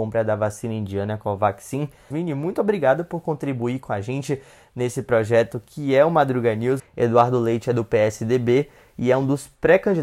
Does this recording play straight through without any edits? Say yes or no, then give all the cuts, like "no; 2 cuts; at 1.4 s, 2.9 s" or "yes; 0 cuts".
no; 2 cuts; at 2.1 s, 6.8 s